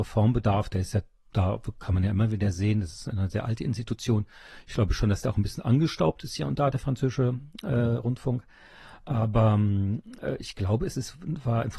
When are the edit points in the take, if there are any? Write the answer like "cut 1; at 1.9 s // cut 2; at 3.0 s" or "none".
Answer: none